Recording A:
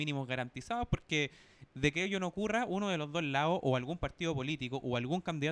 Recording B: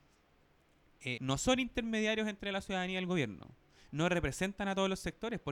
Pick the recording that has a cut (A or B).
B